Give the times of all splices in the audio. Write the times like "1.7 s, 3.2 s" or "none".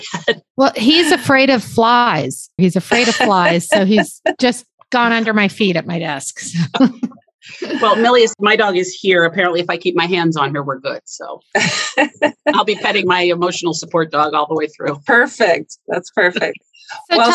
2.6 s